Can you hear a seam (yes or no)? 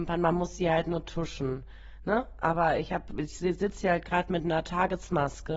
no